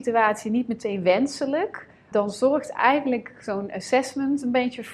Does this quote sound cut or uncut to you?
cut